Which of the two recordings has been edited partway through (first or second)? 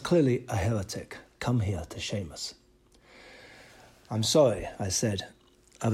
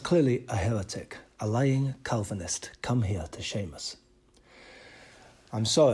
first